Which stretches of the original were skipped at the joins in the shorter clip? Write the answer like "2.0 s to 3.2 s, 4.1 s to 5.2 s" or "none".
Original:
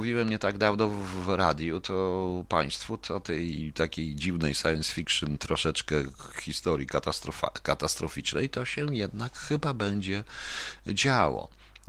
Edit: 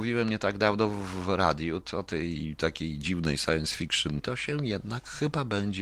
1.8 s to 3.0 s, 5.4 s to 8.5 s